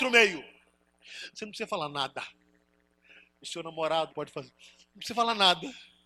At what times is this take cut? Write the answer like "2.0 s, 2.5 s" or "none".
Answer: 1.3 s, 4.1 s